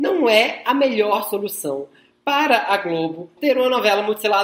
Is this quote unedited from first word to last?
no; 1 cut; at 3.4 s

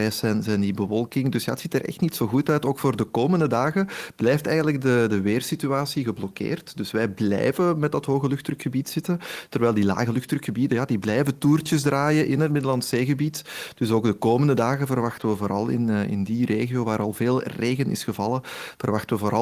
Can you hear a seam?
no; 0 cuts

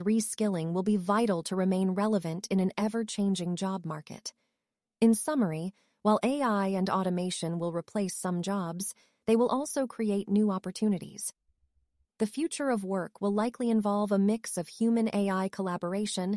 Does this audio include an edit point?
no; 0 cuts

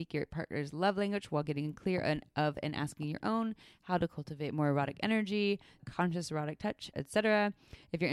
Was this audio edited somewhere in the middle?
yes; 2 cuts; at 5.8 s, 6.9 s

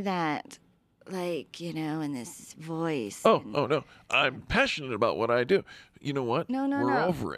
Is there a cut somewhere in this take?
no; 0 cuts

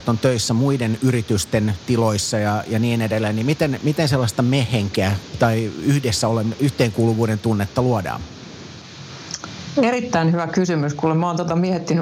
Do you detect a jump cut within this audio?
no; 0 cuts

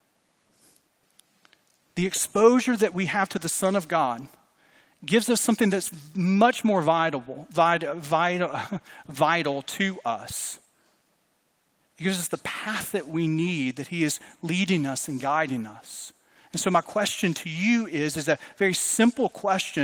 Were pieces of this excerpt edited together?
yes; 1 cut; at 11.8 s

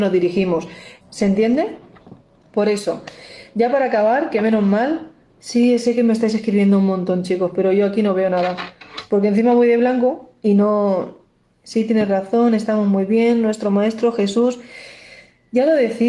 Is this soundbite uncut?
no; 1 cut; at 1.0 s

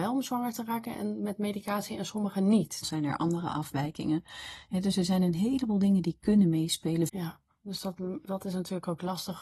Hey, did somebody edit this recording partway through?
yes; 2 cuts; at 2.8 s, 7.1 s

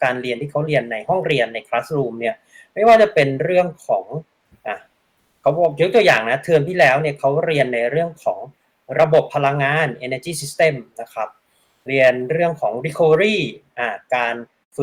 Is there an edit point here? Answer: no; 0 cuts

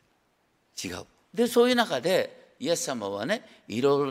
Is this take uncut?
no; 1 cut; at 1.2 s

